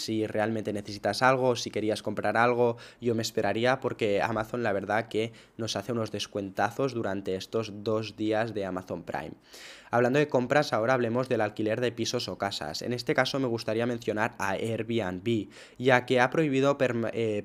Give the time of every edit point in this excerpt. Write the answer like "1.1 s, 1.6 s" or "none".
none